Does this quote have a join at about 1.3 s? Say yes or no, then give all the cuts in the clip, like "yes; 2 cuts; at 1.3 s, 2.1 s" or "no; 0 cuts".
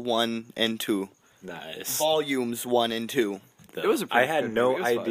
no; 1 cut; at 3.7 s